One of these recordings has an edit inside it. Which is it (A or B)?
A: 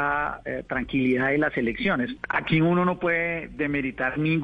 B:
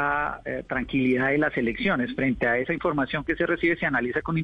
A